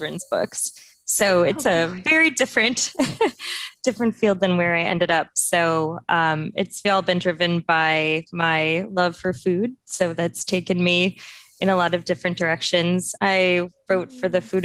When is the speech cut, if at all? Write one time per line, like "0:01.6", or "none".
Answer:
0:06.8
0:13.2